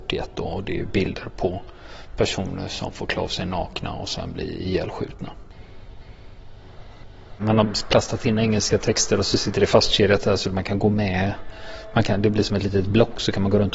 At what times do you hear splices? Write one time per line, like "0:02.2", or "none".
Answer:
none